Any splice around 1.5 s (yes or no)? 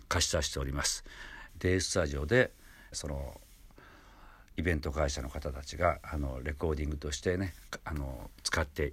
yes